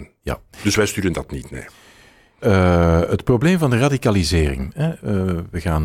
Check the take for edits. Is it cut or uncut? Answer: cut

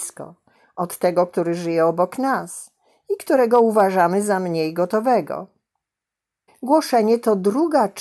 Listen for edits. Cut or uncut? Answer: cut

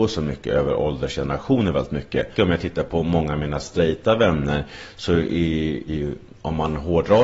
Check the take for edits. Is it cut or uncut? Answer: cut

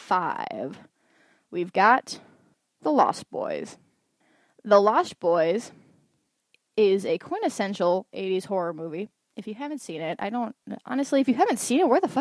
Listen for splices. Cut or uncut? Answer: uncut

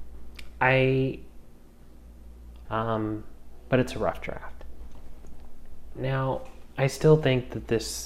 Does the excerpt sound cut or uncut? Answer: cut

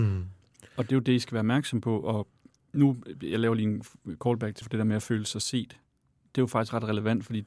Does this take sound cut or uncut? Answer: cut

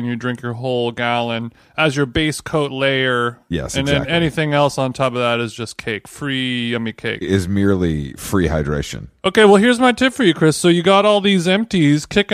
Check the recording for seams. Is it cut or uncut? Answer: uncut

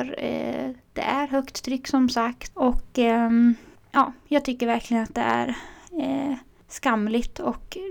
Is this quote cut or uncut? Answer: uncut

